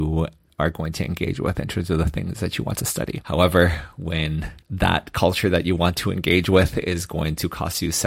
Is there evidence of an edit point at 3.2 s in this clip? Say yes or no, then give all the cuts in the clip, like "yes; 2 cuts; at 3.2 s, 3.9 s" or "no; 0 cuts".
no; 0 cuts